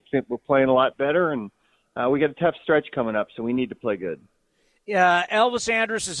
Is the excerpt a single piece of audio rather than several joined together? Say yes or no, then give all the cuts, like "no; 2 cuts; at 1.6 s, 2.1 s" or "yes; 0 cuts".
yes; 0 cuts